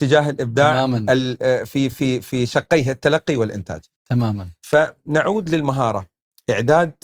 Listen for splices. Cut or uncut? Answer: uncut